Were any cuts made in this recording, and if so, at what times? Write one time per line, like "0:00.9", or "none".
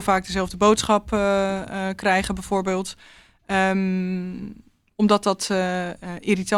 none